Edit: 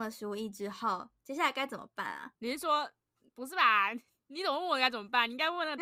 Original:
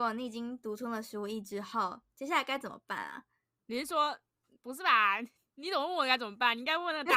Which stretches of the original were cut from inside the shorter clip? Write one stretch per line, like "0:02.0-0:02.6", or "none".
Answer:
0:03.3-0:03.6